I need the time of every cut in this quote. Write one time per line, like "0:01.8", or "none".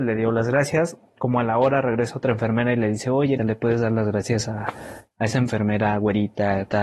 0:03.4